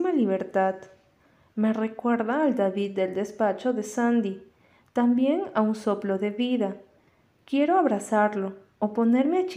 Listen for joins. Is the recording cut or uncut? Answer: uncut